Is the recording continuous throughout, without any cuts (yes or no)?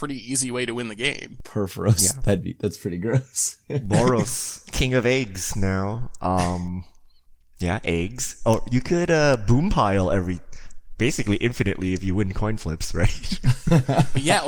yes